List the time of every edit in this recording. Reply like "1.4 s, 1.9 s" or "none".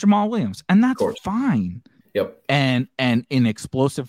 2.0 s